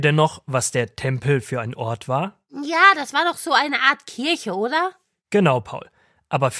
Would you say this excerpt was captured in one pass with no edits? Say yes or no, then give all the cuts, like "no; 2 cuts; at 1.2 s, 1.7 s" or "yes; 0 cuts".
yes; 0 cuts